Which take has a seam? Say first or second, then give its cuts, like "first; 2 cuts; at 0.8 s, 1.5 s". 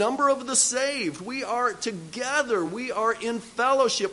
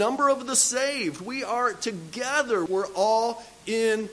second; 1 cut; at 2.7 s